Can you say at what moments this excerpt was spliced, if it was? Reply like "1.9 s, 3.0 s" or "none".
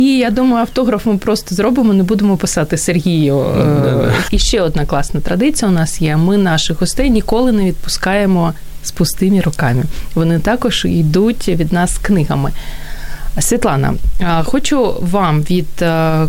4.3 s